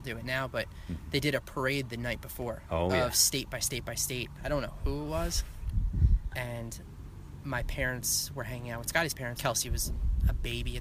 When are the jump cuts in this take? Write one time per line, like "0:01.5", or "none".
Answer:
0:04.4
0:06.3
0:09.4